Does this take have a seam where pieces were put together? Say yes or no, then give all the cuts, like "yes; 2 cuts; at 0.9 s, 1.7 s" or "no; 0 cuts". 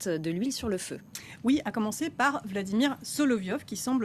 no; 0 cuts